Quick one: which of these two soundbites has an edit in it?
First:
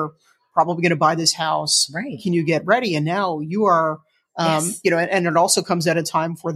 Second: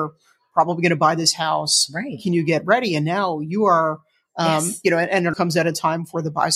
second; 1 cut; at 5.3 s

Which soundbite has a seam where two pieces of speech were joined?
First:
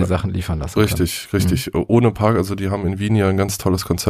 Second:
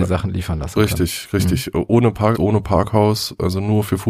second; 1 cut; at 2.3 s

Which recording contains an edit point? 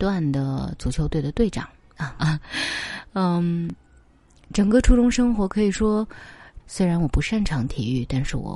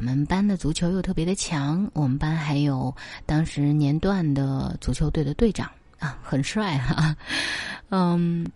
first; 2 cuts; at 2.2 s, 6.6 s

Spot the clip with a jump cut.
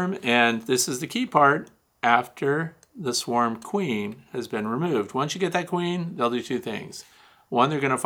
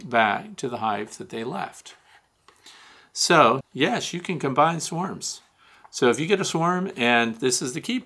second; 1 cut; at 3.6 s

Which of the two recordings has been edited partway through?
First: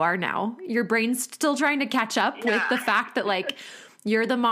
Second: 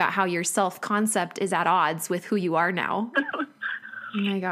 second; 1 cut; at 3.1 s

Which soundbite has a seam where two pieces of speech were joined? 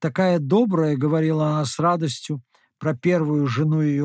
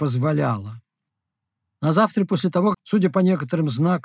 second; 1 cut; at 2.7 s

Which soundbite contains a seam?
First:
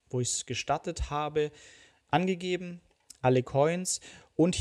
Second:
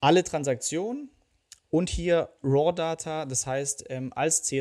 second; 1 cut; at 1.6 s

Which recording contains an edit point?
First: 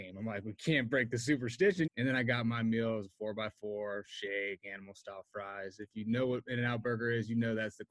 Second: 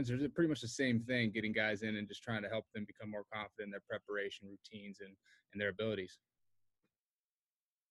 first; 1 cut; at 1.9 s

